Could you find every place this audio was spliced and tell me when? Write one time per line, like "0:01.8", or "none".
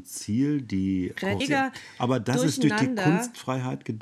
0:01.4